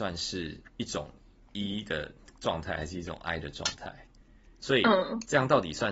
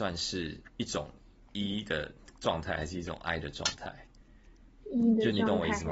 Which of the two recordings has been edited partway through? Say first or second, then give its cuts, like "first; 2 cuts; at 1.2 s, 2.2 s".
first; 1 cut; at 4.6 s